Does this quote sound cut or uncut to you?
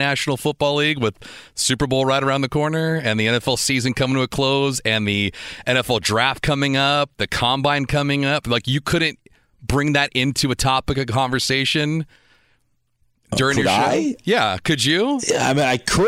uncut